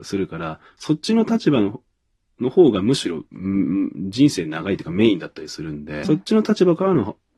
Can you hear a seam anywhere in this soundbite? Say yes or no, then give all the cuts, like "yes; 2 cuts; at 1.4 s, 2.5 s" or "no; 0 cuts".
yes; 1 cut; at 6.0 s